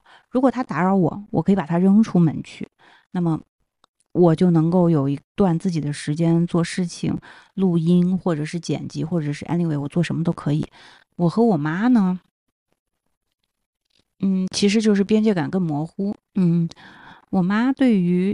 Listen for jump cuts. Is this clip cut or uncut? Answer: cut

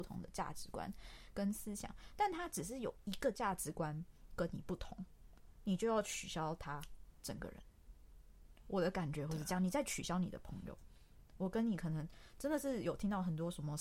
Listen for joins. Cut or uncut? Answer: uncut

